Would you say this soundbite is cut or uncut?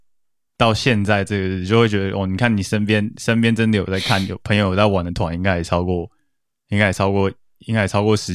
uncut